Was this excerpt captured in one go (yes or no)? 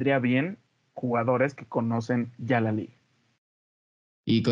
yes